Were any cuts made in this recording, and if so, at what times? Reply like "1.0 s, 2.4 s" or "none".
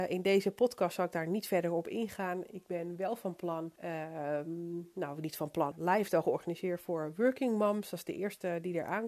3.8 s, 5.7 s